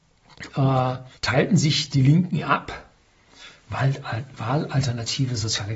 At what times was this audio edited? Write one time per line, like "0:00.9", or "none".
0:01.2